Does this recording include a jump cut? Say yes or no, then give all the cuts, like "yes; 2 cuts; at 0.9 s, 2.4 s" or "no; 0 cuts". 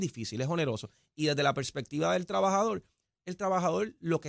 no; 0 cuts